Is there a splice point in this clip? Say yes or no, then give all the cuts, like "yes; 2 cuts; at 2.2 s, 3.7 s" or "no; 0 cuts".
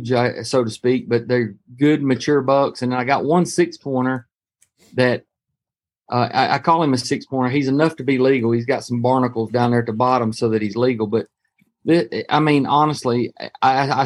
no; 0 cuts